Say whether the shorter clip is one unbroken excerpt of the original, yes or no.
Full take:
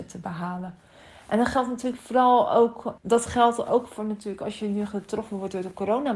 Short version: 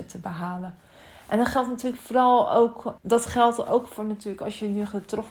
yes